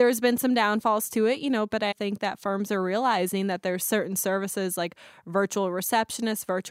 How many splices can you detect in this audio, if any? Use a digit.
1